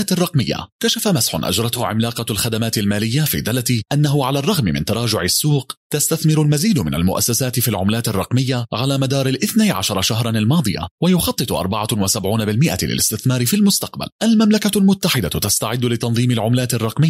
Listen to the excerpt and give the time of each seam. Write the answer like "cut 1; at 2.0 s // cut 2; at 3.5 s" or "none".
cut 1; at 14.1 s